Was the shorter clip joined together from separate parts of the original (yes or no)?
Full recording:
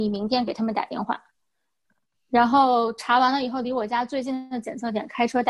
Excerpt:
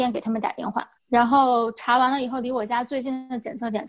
yes